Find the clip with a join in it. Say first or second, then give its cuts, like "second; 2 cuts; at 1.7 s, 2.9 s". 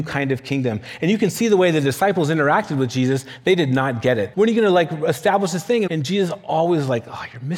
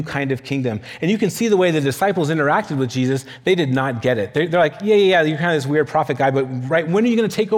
first; 2 cuts; at 4.3 s, 5.9 s